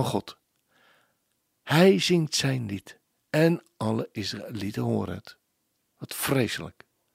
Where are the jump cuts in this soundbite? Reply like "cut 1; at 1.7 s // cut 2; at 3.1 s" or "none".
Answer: cut 1; at 5.9 s